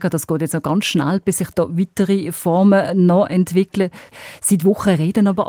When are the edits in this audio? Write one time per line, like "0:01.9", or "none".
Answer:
none